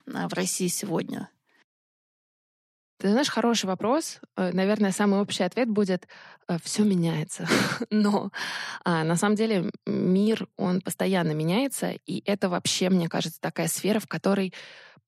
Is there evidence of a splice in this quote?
no; 0 cuts

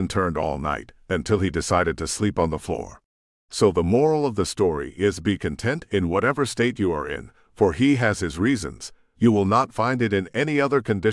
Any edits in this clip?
yes; 2 cuts; at 3.3 s, 9.1 s

